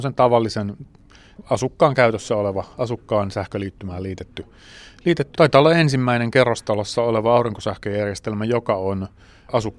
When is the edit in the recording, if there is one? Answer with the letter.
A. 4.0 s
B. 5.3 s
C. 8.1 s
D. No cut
B